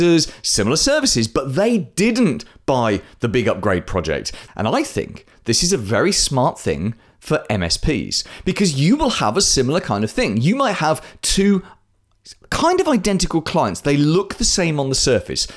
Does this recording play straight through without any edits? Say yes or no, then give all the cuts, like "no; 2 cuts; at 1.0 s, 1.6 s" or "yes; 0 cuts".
no; 1 cut; at 4.5 s